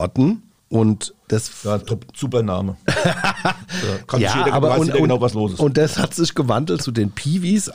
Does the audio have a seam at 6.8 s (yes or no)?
yes